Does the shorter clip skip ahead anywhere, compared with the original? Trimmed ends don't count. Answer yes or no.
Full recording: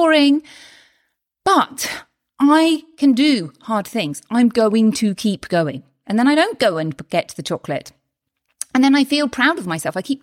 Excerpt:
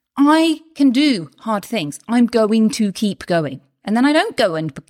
no